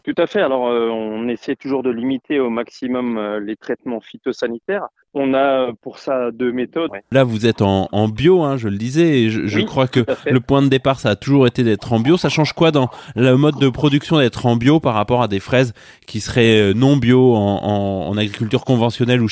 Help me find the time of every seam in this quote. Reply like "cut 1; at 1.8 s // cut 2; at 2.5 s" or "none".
cut 1; at 6.9 s

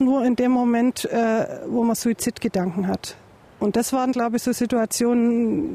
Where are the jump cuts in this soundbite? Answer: none

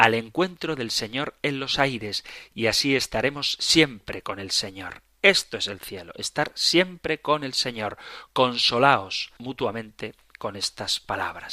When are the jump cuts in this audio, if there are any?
cut 1; at 9.4 s

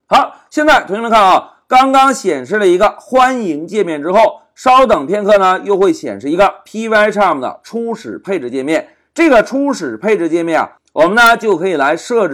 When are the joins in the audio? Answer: none

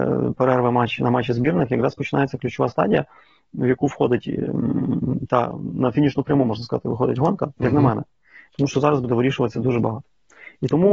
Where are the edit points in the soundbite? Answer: none

